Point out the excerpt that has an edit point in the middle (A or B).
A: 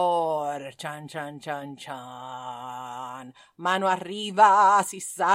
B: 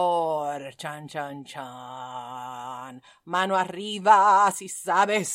B